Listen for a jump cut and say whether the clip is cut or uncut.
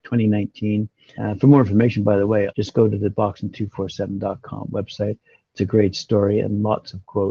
cut